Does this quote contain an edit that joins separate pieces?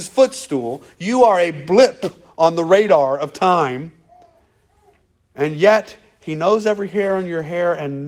no; 0 cuts

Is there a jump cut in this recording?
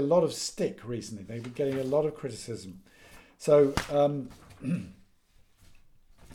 no; 0 cuts

